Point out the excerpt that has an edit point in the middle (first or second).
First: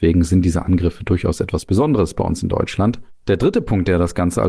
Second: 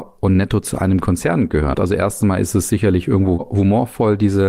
second